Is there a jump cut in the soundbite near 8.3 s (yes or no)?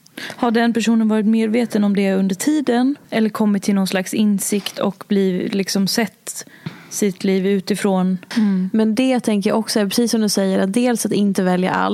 yes